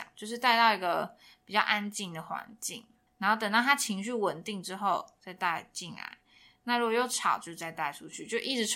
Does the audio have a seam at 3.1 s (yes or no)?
yes